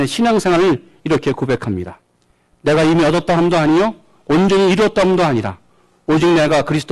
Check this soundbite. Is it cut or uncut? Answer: uncut